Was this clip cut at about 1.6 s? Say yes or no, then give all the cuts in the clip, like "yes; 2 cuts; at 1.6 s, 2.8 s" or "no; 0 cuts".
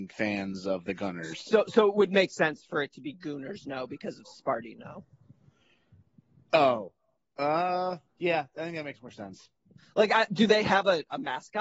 no; 2 cuts; at 8.1 s, 10.3 s